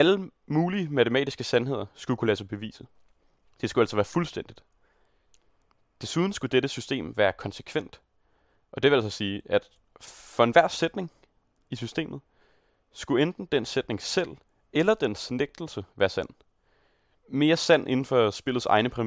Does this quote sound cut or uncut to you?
cut